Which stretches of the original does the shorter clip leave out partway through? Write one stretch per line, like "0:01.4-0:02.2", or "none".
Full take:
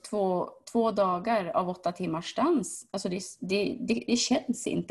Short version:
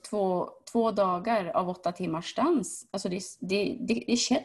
none